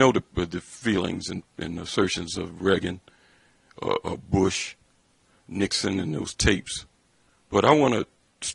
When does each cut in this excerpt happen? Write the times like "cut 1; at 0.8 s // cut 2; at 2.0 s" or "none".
cut 1; at 7.4 s